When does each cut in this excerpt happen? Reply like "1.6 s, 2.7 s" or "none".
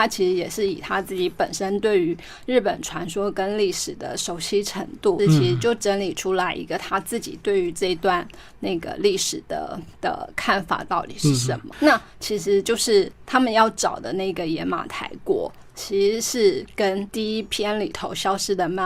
5.2 s